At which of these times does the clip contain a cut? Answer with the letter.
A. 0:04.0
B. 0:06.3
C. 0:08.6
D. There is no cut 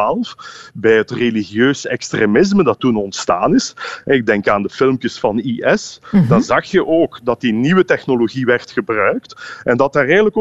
D